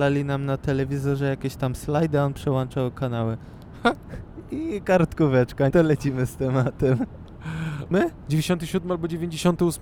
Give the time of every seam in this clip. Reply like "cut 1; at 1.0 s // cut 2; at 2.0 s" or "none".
cut 1; at 5.7 s // cut 2; at 7.9 s